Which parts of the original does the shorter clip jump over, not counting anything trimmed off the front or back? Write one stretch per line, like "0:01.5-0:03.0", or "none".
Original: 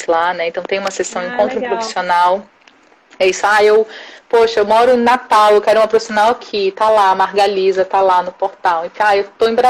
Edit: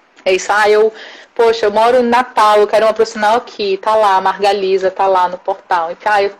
none